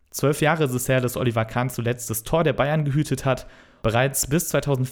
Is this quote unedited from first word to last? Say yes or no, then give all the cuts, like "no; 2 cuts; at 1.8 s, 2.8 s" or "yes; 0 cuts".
no; 1 cut; at 3.8 s